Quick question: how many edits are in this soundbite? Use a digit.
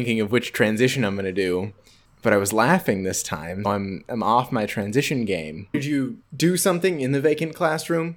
2